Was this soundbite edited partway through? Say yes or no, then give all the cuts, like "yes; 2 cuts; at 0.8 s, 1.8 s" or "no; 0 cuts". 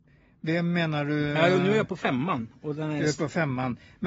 no; 0 cuts